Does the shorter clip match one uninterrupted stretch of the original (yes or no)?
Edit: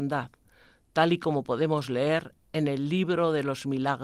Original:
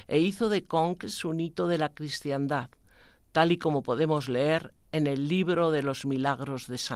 yes